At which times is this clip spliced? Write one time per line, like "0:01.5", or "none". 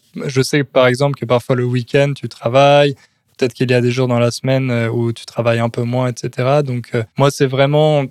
0:07.1